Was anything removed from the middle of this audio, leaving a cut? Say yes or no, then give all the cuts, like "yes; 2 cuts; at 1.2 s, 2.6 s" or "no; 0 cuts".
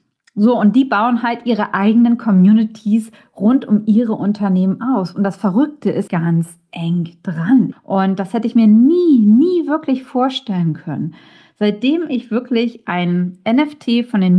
yes; 2 cuts; at 6.1 s, 7.7 s